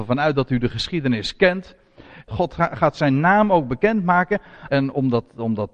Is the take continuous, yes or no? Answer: no